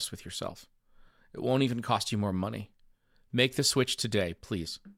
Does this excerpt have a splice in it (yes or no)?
no